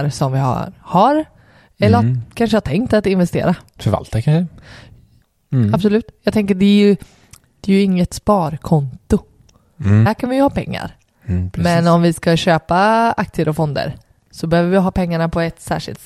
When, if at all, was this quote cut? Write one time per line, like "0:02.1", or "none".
none